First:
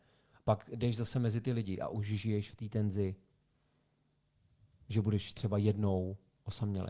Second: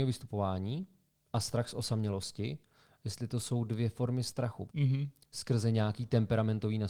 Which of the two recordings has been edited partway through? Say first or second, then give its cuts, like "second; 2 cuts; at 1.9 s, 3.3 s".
second; 1 cut; at 4.7 s